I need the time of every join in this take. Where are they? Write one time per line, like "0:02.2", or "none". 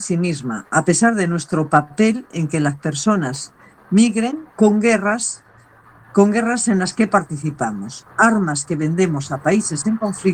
0:04.5